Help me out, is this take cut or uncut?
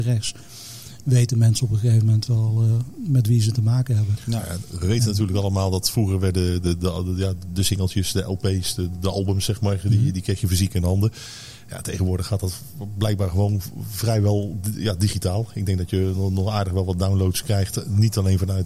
uncut